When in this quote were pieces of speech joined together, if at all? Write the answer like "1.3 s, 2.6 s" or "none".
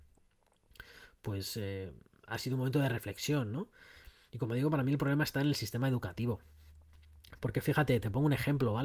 none